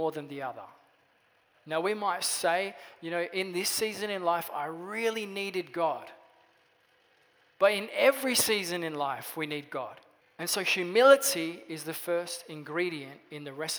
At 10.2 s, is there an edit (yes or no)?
yes